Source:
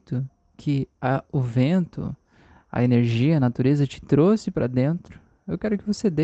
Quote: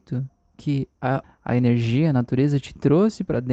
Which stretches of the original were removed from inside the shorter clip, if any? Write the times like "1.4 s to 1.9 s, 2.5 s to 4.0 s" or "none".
1.2 s to 2.5 s